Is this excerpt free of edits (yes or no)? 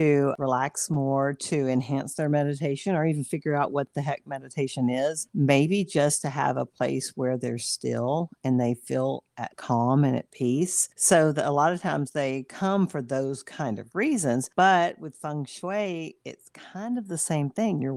yes